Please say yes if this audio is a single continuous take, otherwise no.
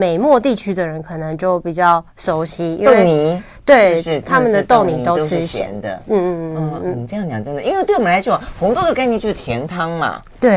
yes